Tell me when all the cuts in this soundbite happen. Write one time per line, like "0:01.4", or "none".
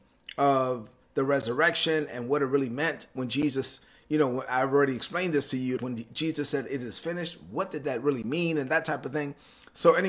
0:05.8